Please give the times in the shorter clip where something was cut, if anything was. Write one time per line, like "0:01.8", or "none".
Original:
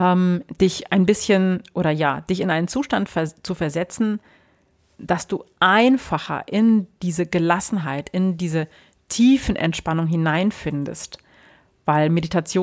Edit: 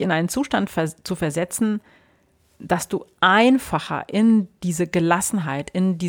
none